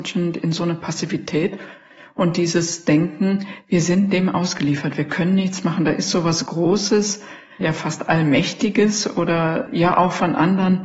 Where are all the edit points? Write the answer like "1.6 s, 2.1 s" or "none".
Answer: 7.6 s, 9.7 s